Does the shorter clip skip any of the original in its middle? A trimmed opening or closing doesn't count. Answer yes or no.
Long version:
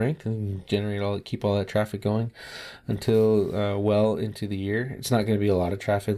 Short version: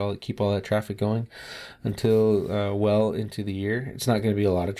no